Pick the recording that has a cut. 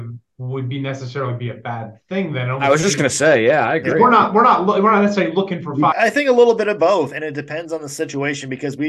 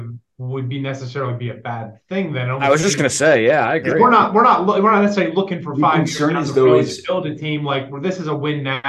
first; 1 cut; at 5.9 s

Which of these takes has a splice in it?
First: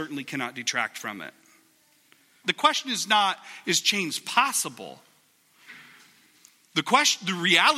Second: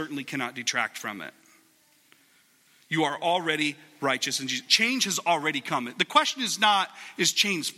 first; 1 cut; at 2.4 s

